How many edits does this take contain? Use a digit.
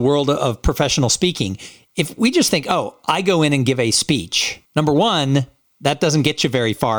1